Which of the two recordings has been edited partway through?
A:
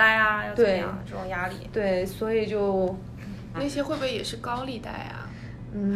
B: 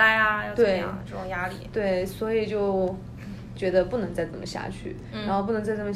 A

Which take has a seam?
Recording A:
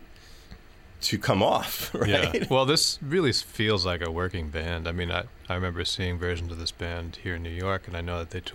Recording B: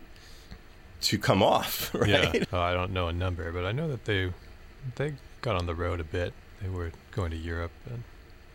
B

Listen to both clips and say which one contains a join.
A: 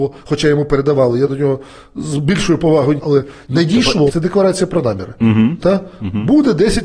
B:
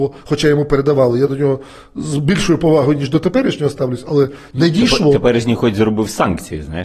A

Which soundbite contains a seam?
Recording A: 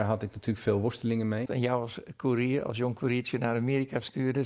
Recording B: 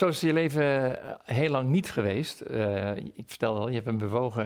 A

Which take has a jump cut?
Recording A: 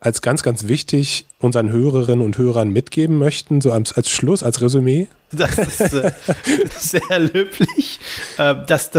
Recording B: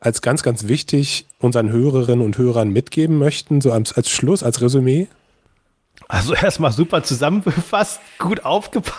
A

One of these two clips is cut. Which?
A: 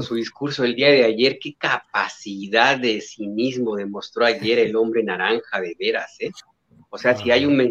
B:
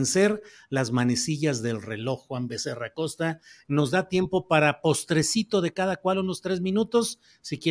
B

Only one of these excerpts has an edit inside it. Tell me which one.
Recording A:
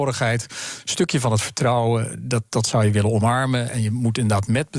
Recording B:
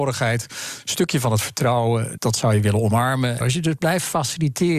B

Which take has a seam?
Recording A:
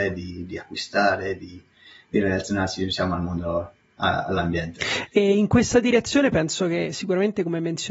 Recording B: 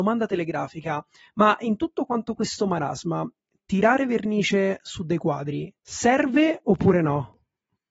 B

